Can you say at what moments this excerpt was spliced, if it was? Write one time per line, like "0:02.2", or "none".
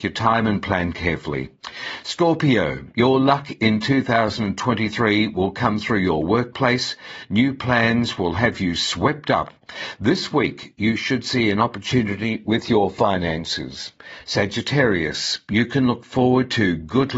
none